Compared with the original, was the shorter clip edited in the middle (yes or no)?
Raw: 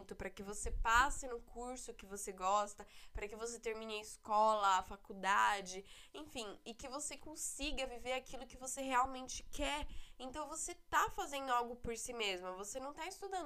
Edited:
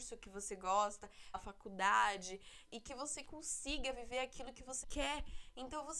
yes